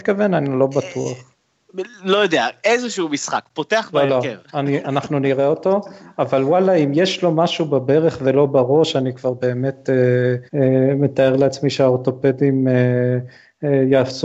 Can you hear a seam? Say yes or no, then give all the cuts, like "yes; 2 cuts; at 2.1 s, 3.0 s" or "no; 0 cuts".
yes; 2 cuts; at 4.4 s, 10.5 s